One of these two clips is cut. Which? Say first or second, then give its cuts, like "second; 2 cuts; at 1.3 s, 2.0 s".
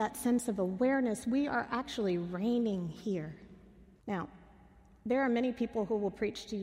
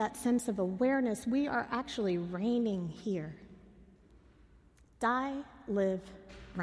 first; 1 cut; at 4.0 s